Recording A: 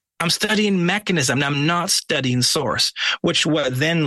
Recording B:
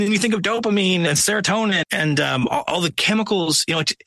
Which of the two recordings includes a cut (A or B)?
B